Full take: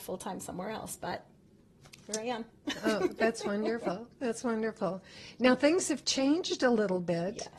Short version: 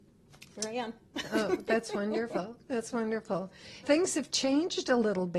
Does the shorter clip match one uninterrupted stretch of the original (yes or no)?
no